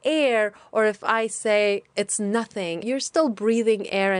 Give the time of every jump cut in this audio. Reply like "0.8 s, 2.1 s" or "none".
2.8 s